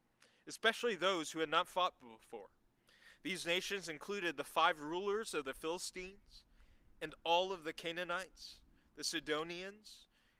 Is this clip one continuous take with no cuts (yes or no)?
yes